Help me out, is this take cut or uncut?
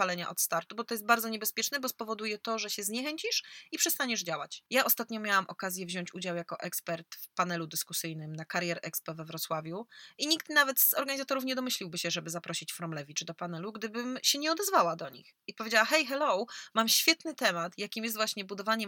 cut